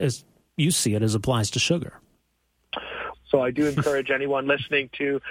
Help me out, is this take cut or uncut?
cut